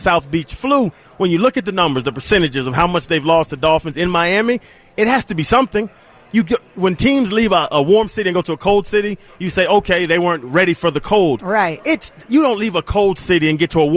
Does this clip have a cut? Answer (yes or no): yes